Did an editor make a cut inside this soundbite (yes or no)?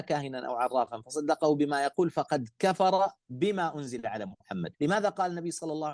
yes